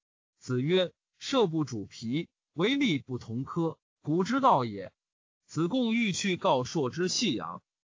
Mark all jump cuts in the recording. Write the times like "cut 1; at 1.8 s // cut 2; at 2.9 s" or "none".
none

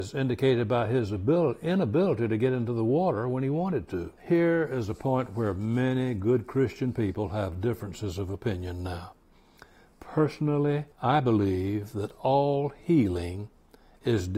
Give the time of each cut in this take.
cut 1; at 4.2 s // cut 2; at 10.9 s

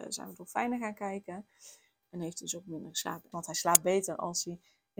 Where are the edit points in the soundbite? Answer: cut 1; at 2.0 s // cut 2; at 3.3 s

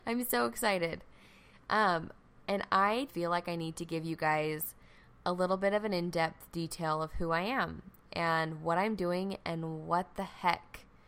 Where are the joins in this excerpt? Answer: cut 1; at 3.1 s

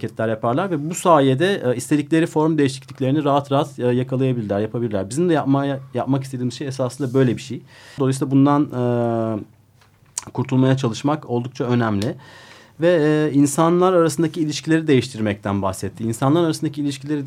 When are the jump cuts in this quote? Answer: cut 1; at 8.0 s

